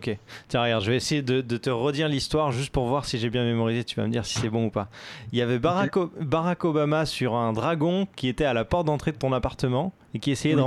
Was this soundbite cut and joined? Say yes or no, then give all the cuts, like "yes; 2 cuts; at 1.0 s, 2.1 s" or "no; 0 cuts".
no; 0 cuts